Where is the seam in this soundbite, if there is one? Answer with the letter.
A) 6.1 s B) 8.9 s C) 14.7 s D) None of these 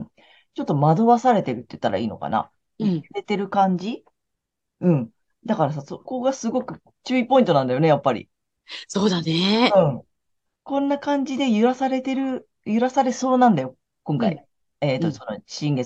A